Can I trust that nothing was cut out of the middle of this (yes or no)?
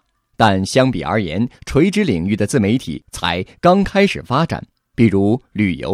yes